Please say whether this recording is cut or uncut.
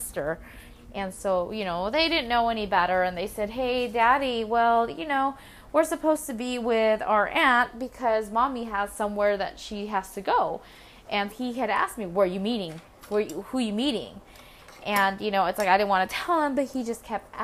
cut